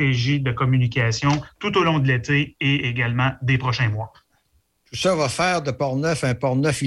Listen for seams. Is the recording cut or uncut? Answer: uncut